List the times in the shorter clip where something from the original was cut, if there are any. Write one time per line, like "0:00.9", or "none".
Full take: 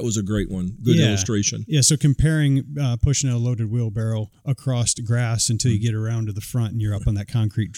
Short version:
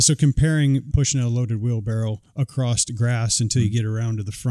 0:00.9